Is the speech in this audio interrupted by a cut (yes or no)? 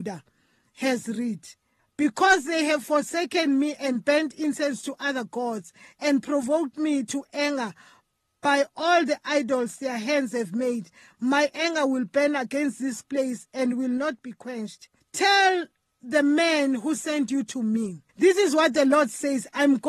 yes